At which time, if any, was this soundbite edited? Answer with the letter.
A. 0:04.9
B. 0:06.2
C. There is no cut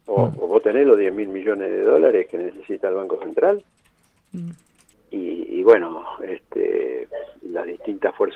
A